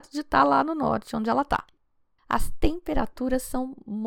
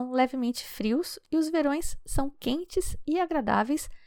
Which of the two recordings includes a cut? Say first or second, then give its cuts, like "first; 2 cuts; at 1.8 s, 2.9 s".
first; 1 cut; at 2.2 s